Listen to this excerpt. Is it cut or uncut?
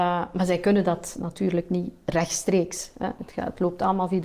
uncut